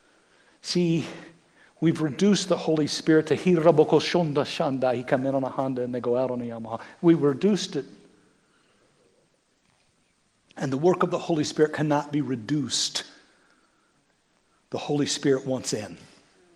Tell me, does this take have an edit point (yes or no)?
no